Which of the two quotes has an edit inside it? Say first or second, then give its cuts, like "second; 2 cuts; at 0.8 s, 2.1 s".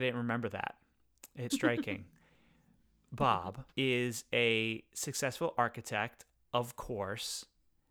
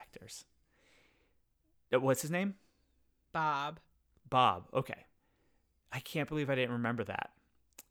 first; 2 cuts; at 1.5 s, 3.7 s